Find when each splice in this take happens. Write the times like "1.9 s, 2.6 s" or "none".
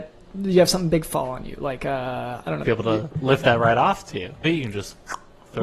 2.6 s, 4.4 s

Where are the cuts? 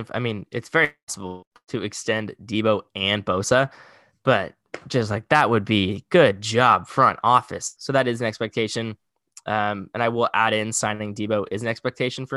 7.8 s

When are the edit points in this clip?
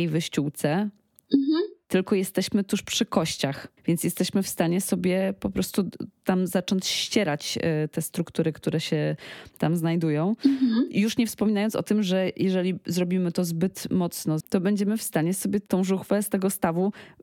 3.8 s, 14.4 s

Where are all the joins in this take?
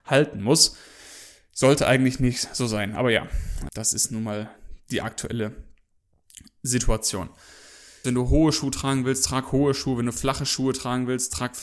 3.7 s, 8.0 s

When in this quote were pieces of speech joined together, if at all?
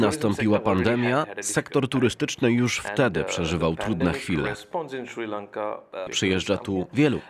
6.1 s

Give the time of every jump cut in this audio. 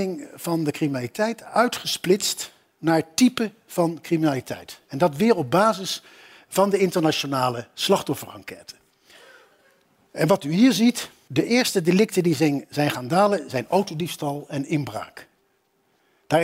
none

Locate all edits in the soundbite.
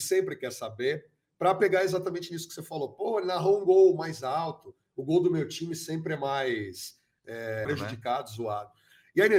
7.7 s

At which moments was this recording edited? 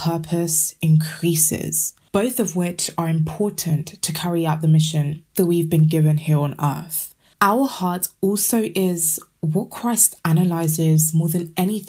none

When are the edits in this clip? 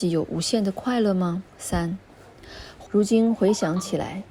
1.5 s, 2.9 s

